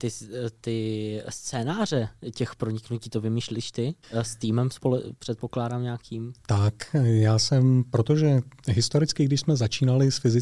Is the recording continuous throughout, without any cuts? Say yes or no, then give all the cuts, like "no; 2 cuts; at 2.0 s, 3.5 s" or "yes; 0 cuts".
no; 1 cut; at 4.0 s